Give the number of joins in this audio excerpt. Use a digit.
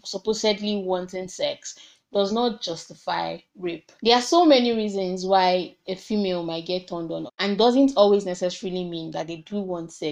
2